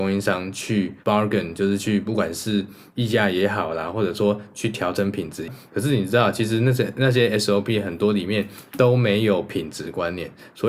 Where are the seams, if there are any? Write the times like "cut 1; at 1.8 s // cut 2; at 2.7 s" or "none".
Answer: cut 1; at 1.0 s // cut 2; at 5.7 s